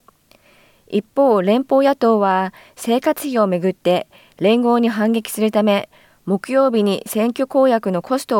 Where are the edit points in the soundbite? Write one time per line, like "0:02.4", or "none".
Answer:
none